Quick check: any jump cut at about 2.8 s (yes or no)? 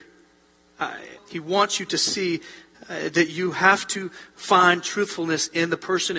no